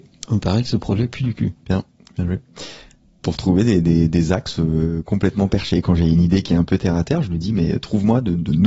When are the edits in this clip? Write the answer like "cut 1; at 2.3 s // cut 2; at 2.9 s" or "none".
none